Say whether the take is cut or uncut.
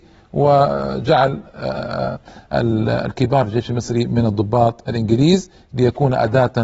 uncut